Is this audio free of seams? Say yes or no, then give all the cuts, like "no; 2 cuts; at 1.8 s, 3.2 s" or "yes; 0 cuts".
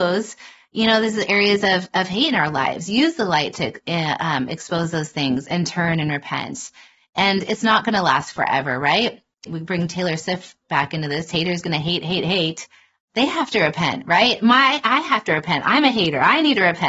no; 1 cut; at 9.5 s